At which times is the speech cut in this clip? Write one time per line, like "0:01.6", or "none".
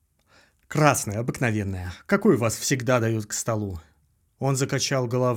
0:04.2